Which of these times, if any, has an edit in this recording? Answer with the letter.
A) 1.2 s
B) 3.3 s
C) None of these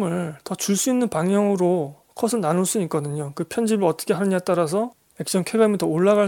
C